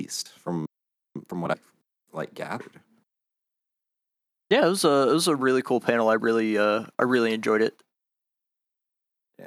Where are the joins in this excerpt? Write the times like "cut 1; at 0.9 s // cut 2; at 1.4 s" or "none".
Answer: none